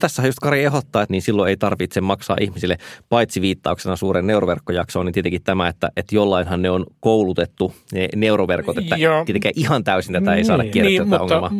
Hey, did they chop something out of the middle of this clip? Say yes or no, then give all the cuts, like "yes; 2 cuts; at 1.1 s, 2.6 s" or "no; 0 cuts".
yes; 1 cut; at 1.0 s